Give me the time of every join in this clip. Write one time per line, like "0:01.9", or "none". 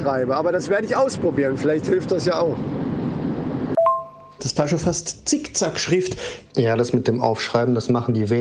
0:04.4
0:06.4

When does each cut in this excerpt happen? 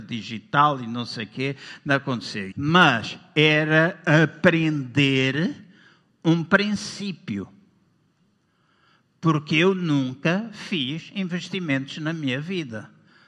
0:02.5

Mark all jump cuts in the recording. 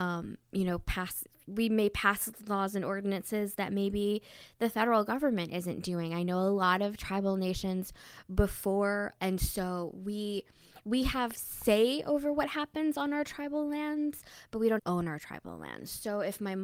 0:09.2
0:14.8

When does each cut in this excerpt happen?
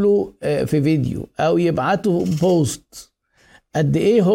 none

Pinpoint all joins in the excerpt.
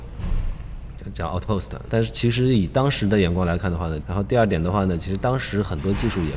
0:01.9
0:04.0

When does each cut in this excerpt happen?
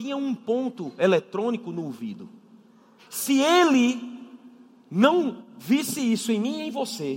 0:03.0

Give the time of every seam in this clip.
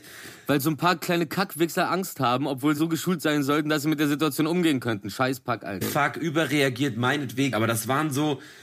0:02.8
0:05.8
0:07.5

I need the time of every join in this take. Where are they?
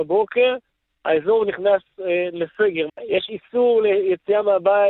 0:02.9

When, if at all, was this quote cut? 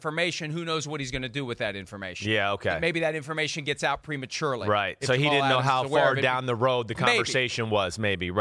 none

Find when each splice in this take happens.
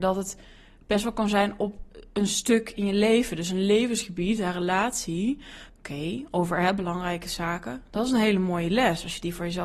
0:05.7

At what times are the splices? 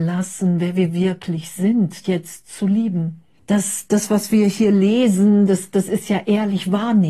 0:02.0
0:03.4

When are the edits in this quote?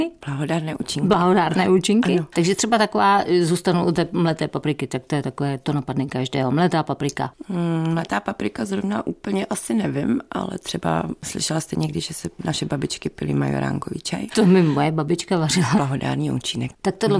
0:14.3
0:15.8

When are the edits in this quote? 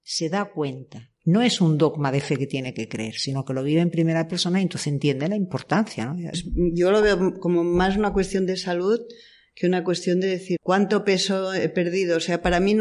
0:06.3
0:10.6

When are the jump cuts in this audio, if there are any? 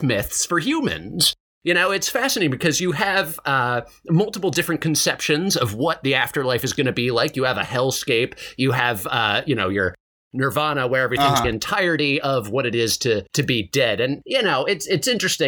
0:11.4

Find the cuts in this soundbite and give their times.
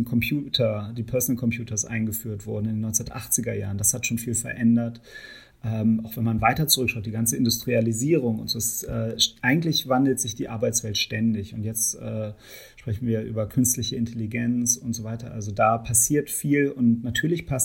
none

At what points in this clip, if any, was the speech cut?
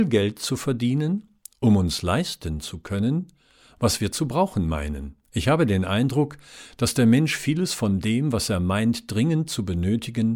0:05.2

